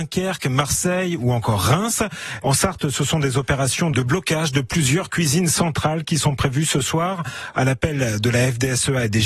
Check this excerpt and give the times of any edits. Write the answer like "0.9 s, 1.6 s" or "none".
2.4 s, 3.9 s